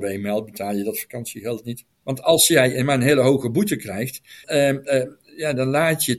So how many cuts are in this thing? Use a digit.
2